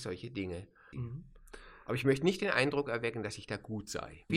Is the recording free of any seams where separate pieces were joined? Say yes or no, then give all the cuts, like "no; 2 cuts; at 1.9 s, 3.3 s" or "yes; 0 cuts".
no; 1 cut; at 0.9 s